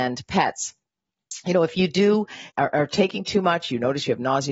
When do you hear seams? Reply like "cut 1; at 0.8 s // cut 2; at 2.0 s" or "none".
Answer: cut 1; at 2.5 s